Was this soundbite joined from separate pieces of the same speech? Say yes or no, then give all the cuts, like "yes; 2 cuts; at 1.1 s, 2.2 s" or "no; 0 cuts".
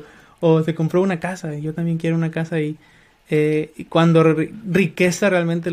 no; 0 cuts